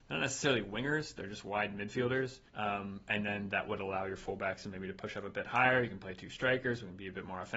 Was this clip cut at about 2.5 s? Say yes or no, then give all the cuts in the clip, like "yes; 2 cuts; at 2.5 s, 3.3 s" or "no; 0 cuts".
yes; 1 cut; at 2.5 s